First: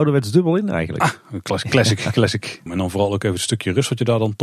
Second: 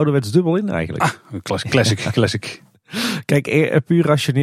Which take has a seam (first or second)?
first